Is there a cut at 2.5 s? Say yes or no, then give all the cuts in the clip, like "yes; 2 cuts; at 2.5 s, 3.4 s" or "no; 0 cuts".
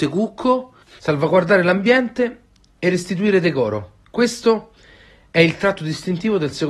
no; 1 cut; at 1.0 s